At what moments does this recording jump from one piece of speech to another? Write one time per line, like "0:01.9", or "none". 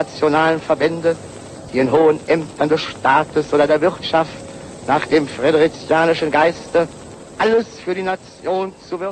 0:01.7